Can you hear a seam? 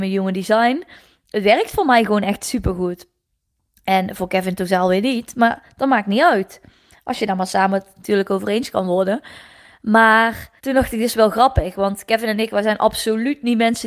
yes; 1 cut; at 10.6 s

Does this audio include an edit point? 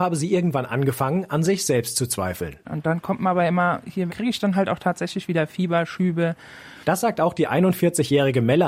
yes; 2 cuts; at 4.1 s, 6.8 s

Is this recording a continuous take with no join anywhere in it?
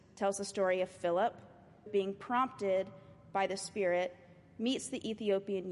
no; 1 cut; at 1.9 s

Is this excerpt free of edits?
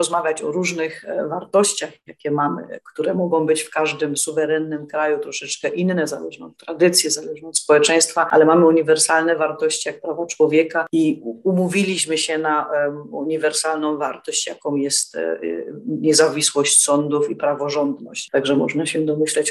no; 1 cut; at 18.3 s

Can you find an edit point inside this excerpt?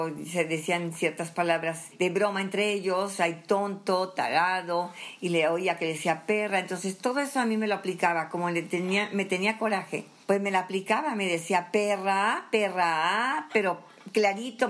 no; 0 cuts

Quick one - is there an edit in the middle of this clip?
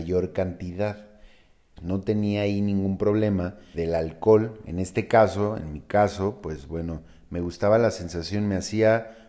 yes; 2 cuts; at 1.8 s, 3.7 s

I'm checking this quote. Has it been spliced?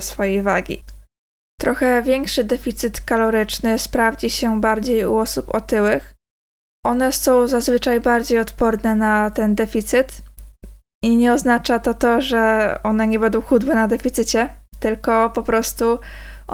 no; 0 cuts

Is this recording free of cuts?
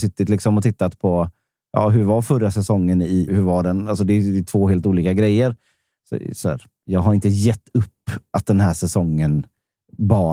no; 1 cut; at 3.3 s

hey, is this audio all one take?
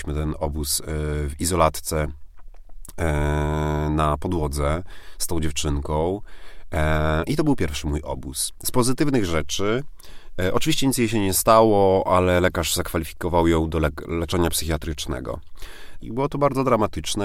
no; 1 cut; at 16.0 s

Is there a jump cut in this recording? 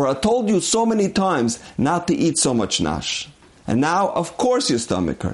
no; 0 cuts

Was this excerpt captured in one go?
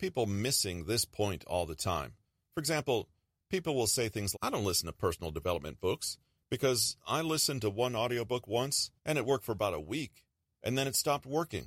no; 2 cuts; at 4.3 s, 9.0 s

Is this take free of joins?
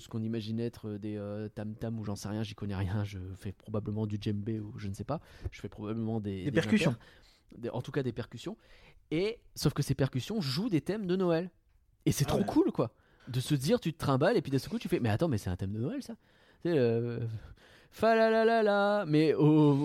yes; 0 cuts

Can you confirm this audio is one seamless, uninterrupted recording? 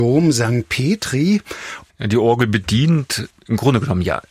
no; 1 cut; at 1.9 s

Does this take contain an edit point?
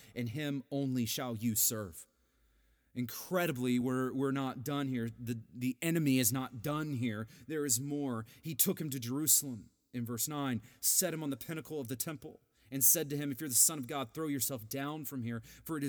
no; 0 cuts

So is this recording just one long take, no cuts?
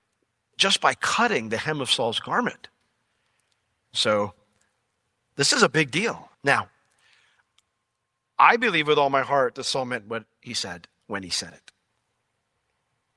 no; 2 cuts; at 3.8 s, 6.3 s

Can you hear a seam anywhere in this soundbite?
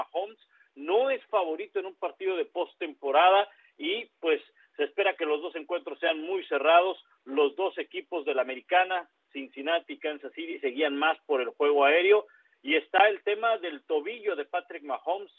no; 0 cuts

